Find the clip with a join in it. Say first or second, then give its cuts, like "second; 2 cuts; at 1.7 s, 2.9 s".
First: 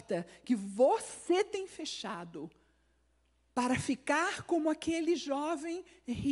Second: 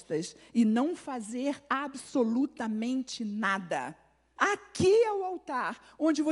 second; 1 cut; at 4.4 s